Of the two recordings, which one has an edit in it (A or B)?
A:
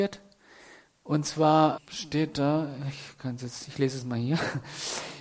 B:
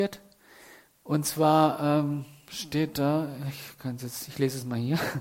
A